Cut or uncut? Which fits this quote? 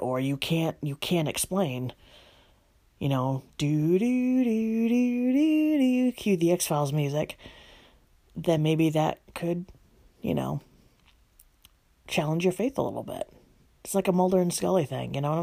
uncut